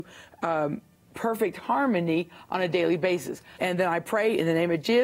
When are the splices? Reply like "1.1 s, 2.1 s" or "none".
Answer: 3.6 s